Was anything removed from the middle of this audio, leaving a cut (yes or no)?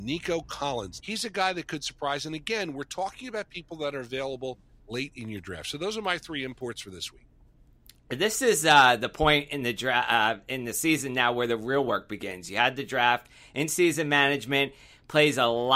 yes